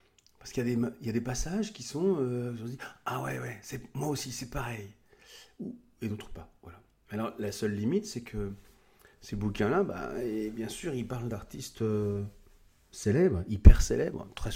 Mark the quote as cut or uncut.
uncut